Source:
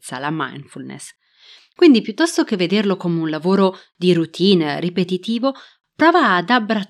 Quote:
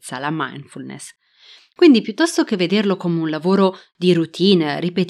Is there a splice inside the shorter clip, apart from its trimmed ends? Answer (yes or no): no